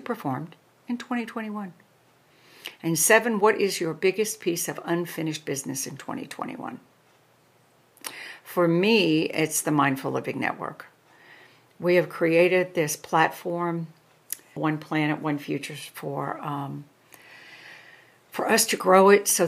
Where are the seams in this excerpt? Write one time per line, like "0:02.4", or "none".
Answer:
0:14.6